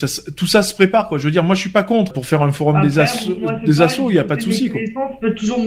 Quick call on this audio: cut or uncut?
cut